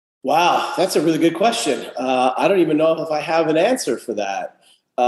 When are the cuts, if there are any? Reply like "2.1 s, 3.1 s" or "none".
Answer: none